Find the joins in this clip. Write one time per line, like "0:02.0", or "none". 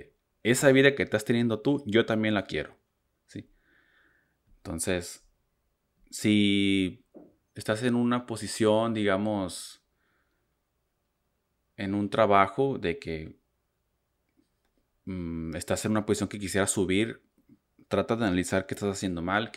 0:03.2